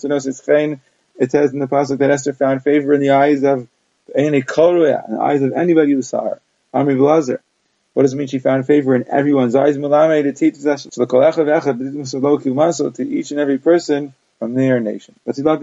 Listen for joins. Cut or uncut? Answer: cut